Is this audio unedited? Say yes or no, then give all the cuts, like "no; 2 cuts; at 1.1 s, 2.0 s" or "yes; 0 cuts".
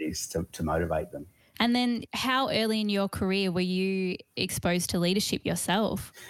no; 1 cut; at 1.5 s